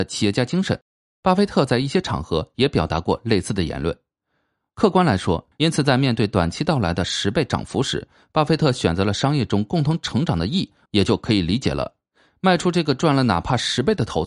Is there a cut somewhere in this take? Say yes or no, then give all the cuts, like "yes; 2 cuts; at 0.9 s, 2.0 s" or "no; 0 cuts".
yes; 2 cuts; at 5.5 s, 10.9 s